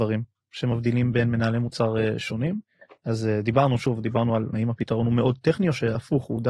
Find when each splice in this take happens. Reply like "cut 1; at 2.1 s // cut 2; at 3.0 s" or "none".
cut 1; at 4.5 s